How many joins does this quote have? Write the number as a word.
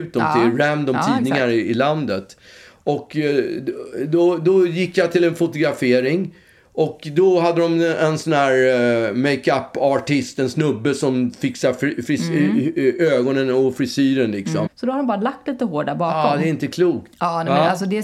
two